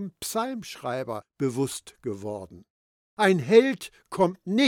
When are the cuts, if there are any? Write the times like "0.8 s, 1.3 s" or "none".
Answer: 3.0 s